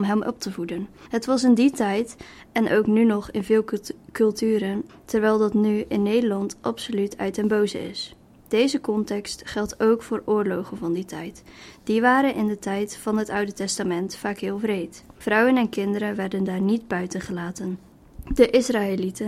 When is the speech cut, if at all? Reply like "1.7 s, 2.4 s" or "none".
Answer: 4.9 s